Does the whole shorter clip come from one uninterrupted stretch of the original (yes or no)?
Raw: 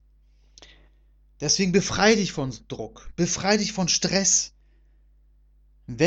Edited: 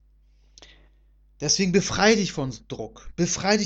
yes